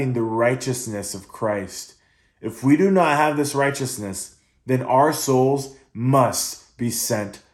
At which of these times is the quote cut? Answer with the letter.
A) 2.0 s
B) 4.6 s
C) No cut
C